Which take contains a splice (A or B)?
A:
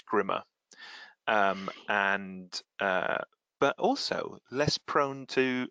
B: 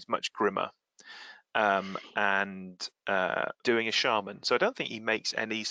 B